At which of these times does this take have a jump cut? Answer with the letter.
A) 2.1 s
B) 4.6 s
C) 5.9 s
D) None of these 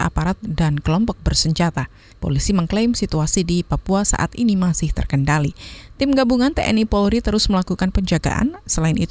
A